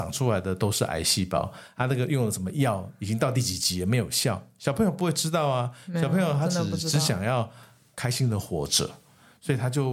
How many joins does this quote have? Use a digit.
0